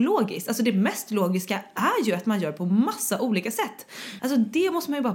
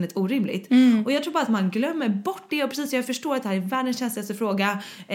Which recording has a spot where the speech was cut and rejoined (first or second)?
first